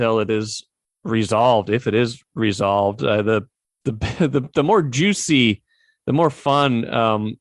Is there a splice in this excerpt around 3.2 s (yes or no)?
no